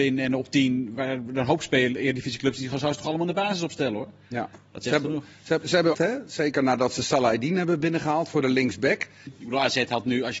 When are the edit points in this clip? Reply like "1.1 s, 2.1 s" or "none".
5.9 s, 9.3 s